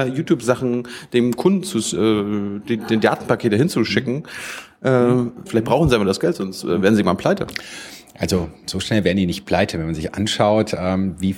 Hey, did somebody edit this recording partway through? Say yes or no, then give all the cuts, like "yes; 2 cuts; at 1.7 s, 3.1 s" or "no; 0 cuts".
yes; 1 cut; at 5.5 s